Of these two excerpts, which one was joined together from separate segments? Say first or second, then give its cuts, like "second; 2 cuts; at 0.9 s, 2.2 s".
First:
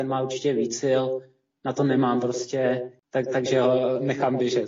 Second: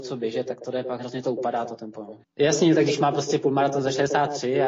second; 2 cuts; at 1.0 s, 2.2 s